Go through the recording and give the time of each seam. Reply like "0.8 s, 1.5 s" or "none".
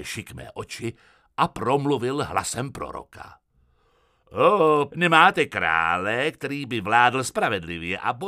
4.9 s